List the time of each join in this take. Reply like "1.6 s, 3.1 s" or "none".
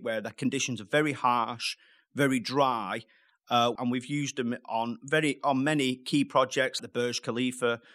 3.8 s, 6.8 s